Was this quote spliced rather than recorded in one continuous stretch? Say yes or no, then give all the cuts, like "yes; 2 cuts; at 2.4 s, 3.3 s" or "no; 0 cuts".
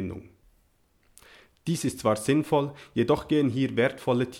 no; 0 cuts